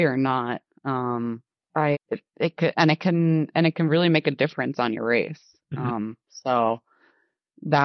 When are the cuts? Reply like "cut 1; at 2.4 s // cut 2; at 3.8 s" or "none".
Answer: cut 1; at 1.9 s